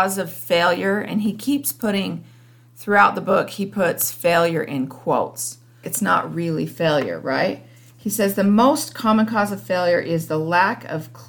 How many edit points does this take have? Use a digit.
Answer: 1